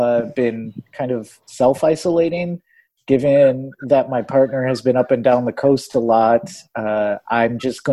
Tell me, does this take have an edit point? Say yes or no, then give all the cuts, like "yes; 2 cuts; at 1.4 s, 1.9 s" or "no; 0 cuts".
no; 0 cuts